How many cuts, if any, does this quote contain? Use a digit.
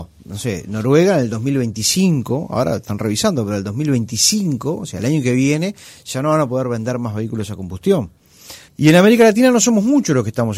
1